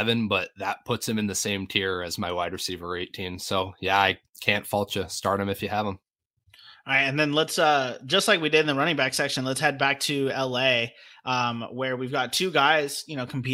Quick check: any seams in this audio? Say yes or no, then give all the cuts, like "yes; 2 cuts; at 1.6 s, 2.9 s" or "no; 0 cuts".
no; 0 cuts